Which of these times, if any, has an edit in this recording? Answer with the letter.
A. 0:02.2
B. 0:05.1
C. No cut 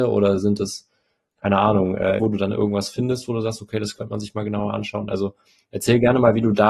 A